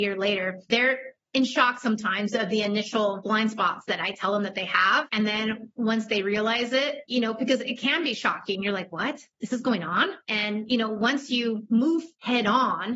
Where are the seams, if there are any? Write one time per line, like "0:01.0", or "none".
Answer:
0:07.1